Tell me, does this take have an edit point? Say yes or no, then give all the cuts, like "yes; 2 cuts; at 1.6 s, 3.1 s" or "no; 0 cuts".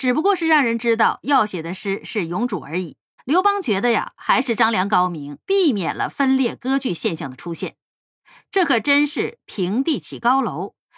yes; 3 cuts; at 3.2 s, 5.5 s, 7.9 s